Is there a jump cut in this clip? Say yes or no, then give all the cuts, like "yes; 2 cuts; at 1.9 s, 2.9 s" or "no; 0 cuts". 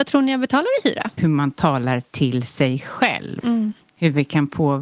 yes; 2 cuts; at 1.2 s, 3.4 s